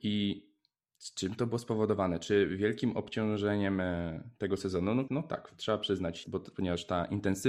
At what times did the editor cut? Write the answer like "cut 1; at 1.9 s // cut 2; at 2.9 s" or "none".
cut 1; at 5.1 s // cut 2; at 6.2 s